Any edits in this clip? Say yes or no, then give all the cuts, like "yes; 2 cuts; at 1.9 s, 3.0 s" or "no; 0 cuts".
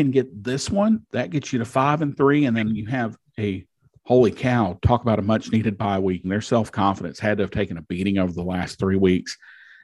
yes; 1 cut; at 6.2 s